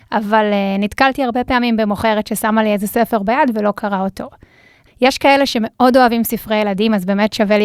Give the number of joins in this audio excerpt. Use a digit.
1